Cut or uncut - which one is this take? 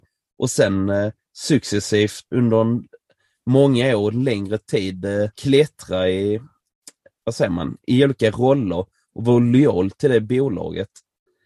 cut